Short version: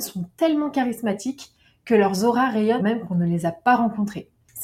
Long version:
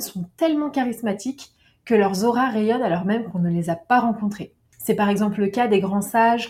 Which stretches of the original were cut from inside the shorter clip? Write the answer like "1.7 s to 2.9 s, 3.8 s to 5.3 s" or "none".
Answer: 2.8 s to 3.0 s